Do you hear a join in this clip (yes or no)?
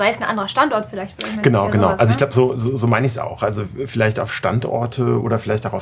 no